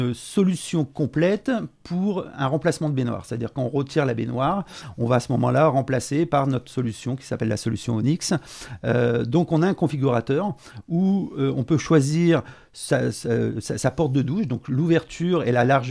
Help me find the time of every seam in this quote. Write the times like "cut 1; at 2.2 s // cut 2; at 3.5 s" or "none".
none